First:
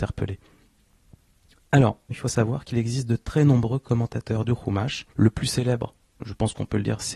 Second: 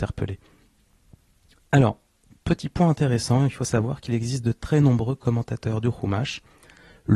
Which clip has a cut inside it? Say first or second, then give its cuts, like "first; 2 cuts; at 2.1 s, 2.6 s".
first; 2 cuts; at 2.1 s, 5.1 s